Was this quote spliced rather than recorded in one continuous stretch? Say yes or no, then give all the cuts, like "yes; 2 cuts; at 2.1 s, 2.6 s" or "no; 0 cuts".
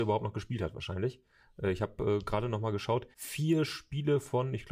yes; 1 cut; at 3.1 s